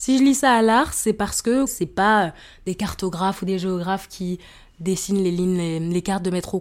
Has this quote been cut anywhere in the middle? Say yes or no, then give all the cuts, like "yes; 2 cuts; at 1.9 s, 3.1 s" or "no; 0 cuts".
yes; 1 cut; at 1.7 s